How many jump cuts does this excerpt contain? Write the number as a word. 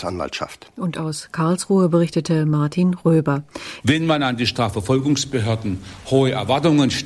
one